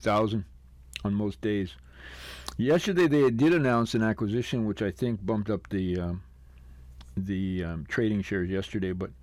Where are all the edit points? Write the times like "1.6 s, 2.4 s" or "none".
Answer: none